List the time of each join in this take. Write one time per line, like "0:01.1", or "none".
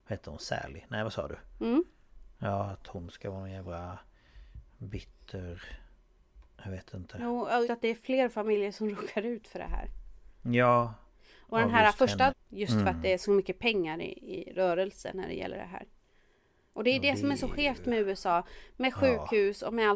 0:07.6
0:12.3